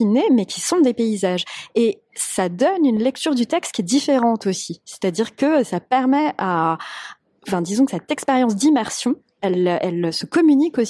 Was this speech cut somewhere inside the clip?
no; 0 cuts

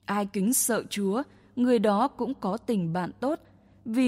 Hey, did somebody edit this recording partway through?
no; 0 cuts

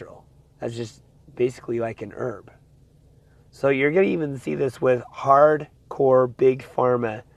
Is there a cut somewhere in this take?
no; 0 cuts

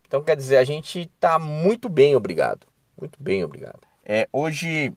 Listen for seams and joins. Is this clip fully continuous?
no; 1 cut; at 3.8 s

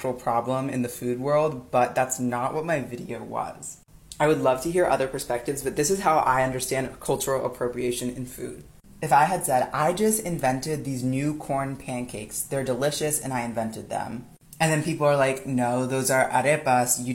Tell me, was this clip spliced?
no; 0 cuts

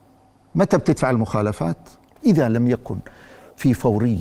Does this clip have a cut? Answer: yes; 1 cut; at 2.2 s

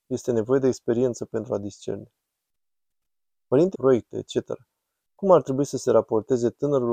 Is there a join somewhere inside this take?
yes; 1 cut; at 3.7 s

